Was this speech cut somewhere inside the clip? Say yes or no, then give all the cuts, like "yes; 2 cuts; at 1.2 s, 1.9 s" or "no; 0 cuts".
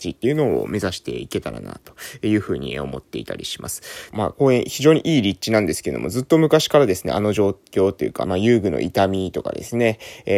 yes; 2 cuts; at 4.1 s, 8.2 s